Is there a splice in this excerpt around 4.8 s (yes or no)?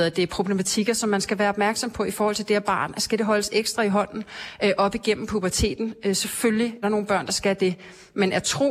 no